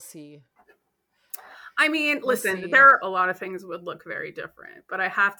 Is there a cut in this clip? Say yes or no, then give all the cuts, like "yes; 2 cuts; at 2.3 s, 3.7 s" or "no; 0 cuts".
yes; 1 cut; at 3.0 s